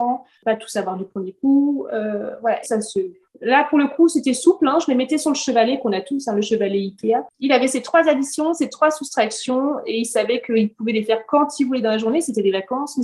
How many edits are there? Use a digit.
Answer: 1